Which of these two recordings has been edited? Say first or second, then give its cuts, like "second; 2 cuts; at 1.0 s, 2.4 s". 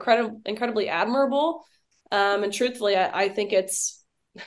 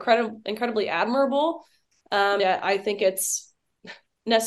second; 1 cut; at 2.4 s